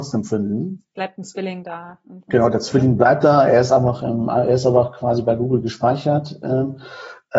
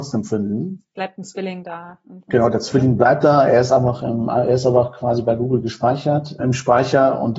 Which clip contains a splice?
second; 1 cut; at 6.4 s

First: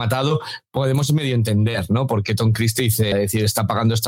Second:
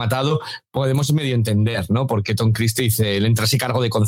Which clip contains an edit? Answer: first; 1 cut; at 3.1 s

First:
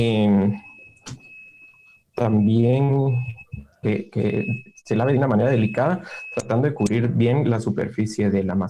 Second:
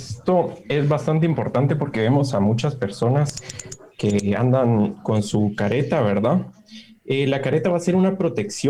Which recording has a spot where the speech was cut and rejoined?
first; 1 cut; at 3.8 s

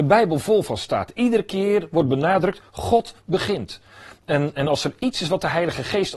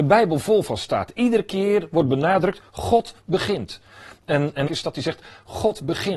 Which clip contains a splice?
second; 1 cut; at 4.7 s

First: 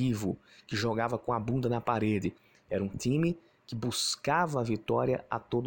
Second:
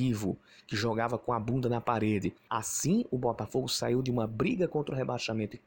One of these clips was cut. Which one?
second; 1 cut; at 2.5 s

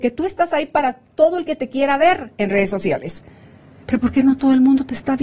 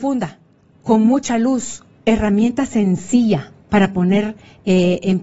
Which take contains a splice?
second; 2 cuts; at 2.0 s, 3.6 s

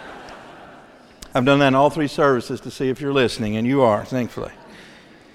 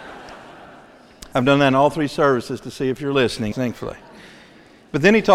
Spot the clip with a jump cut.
second; 1 cut; at 3.5 s

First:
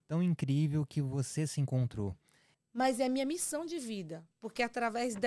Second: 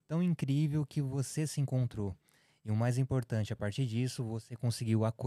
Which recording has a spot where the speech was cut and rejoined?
first; 1 cut; at 2.5 s

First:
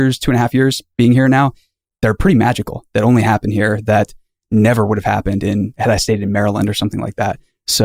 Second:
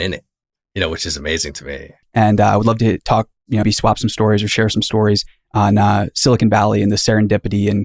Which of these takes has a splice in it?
second; 2 cuts; at 2.0 s, 3.6 s

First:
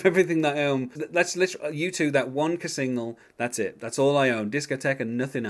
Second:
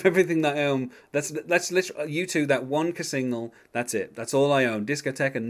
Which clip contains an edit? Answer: first; 1 cut; at 0.9 s

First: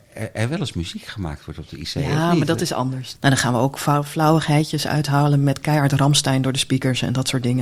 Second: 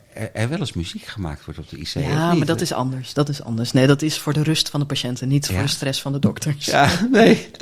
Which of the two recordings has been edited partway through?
first; 1 cut; at 3.1 s

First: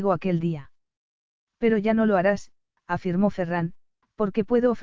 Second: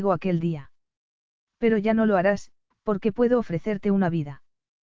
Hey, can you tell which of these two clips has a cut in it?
second; 1 cut; at 2.7 s

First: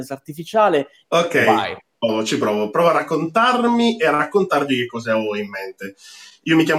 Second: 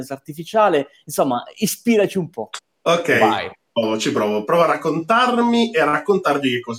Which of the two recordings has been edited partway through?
first; 1 cut; at 1.0 s

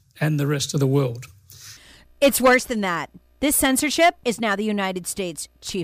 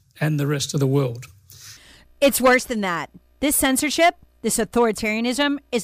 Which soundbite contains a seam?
first; 1 cut; at 4.2 s

